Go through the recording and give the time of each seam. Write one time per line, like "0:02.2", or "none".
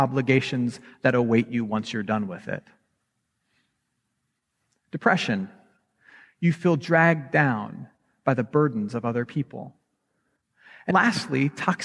0:10.9